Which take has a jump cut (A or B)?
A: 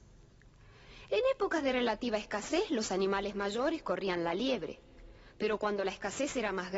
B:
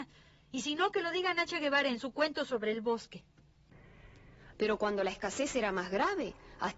B